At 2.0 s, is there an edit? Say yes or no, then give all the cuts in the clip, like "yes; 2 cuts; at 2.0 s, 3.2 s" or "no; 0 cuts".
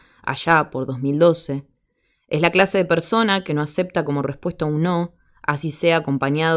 no; 0 cuts